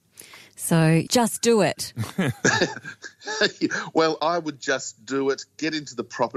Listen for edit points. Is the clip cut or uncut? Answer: cut